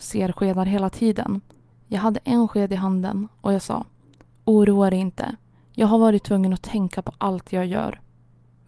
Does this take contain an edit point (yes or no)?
yes